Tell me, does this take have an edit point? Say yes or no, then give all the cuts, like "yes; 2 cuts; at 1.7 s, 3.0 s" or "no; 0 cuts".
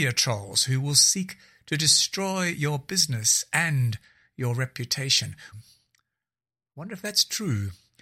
yes; 1 cut; at 5.5 s